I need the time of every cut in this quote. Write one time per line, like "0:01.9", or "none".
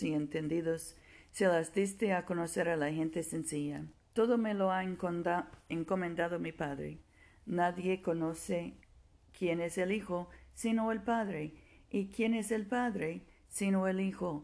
0:04.1